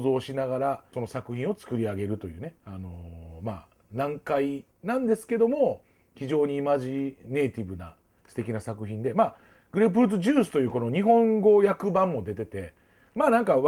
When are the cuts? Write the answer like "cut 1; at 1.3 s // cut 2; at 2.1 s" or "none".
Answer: cut 1; at 0.9 s // cut 2; at 2.6 s // cut 3; at 4.7 s